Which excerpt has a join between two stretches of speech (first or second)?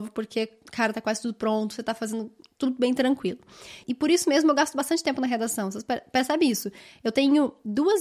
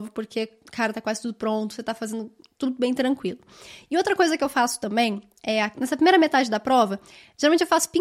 first